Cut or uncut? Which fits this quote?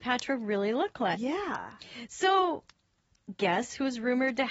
cut